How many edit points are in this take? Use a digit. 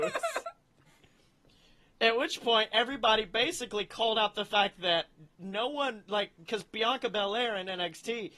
0